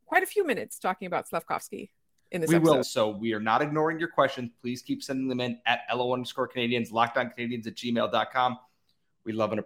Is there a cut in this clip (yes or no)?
yes